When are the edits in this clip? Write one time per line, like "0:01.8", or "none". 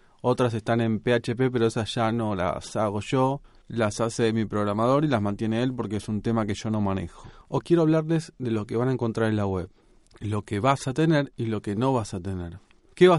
0:07.6